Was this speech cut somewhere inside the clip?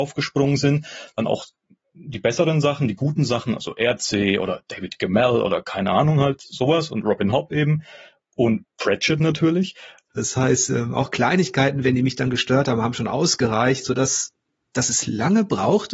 yes; 1 cut; at 10.1 s

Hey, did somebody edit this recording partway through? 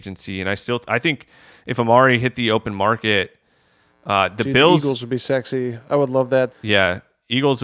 yes; 1 cut; at 6.5 s

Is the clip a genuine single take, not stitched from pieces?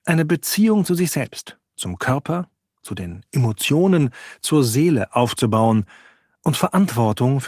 yes; 0 cuts

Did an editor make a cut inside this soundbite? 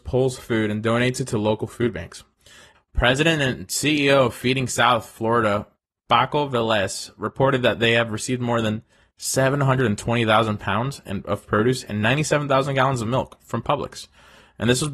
yes; 1 cut; at 2.7 s

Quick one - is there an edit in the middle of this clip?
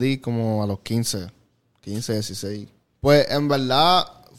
yes; 1 cut; at 2.9 s

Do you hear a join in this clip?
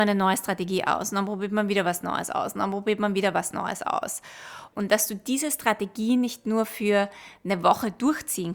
yes; 1 cut; at 4.7 s

